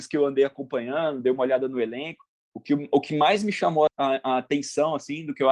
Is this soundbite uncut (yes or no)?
no